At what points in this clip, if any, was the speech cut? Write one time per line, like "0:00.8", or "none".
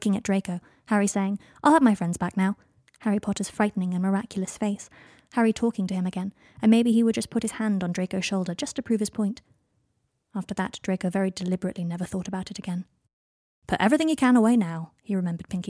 none